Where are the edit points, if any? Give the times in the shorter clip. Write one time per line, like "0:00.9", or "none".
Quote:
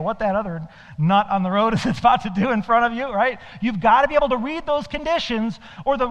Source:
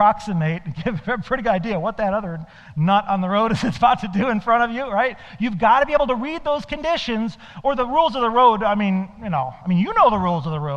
none